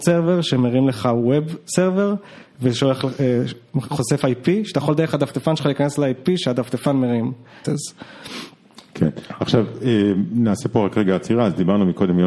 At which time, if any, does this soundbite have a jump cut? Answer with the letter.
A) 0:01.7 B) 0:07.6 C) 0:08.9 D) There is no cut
B